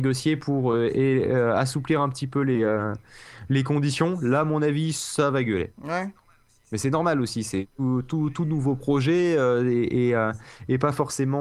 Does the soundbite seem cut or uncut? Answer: uncut